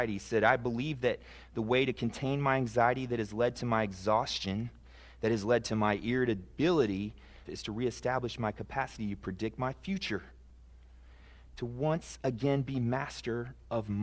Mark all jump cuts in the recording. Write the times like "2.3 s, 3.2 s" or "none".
7.4 s